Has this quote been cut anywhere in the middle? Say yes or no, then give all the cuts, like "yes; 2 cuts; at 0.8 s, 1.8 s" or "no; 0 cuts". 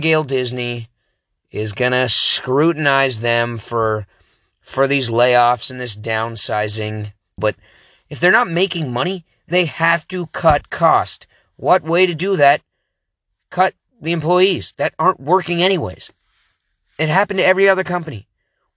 yes; 1 cut; at 7.4 s